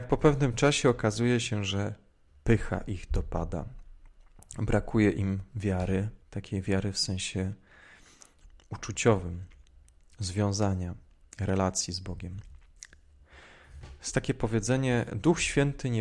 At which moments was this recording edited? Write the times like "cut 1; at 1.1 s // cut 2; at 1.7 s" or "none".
cut 1; at 6.2 s